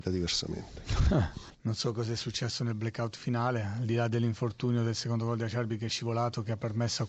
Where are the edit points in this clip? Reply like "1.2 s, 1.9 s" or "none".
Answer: 1.5 s